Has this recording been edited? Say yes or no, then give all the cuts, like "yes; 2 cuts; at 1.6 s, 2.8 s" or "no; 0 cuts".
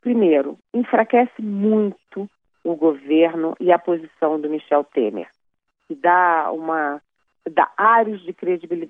yes; 1 cut; at 5.7 s